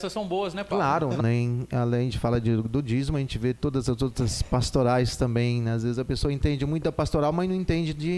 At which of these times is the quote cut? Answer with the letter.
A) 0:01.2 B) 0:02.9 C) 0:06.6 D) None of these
A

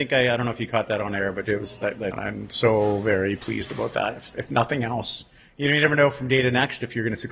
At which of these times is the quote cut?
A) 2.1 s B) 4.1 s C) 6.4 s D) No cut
A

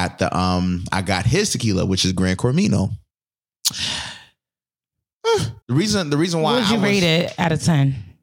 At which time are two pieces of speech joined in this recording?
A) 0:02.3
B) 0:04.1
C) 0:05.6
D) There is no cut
C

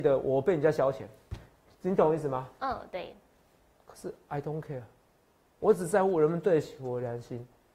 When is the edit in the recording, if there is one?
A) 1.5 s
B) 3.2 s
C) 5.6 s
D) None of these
C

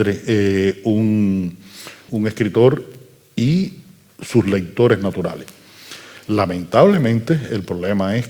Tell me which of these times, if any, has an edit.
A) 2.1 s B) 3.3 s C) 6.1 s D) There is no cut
A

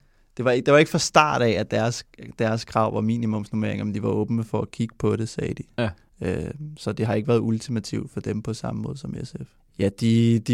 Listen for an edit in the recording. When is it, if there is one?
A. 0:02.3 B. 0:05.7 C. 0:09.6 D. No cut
C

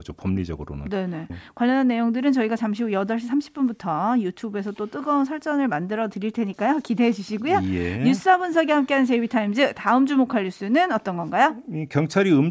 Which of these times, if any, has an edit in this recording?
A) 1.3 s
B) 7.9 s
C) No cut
A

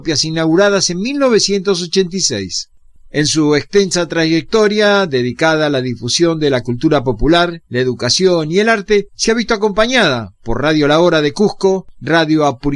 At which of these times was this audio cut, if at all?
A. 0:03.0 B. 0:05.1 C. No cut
A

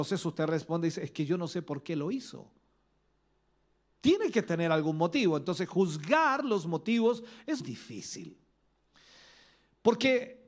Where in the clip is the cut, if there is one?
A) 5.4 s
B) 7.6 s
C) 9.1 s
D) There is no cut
B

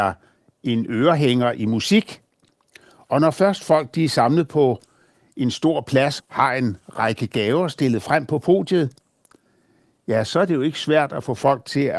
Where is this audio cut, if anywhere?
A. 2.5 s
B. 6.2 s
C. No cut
B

